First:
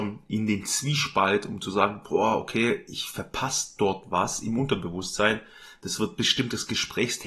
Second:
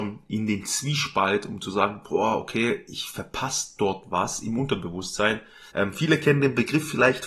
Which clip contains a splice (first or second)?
second